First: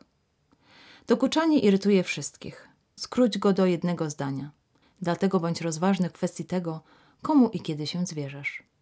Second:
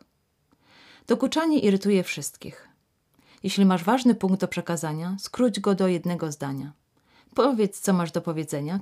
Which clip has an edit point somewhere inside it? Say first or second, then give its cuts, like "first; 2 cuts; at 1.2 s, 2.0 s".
first; 2 cuts; at 3.0 s, 4.8 s